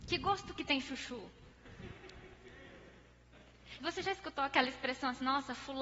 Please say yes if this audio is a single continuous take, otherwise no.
no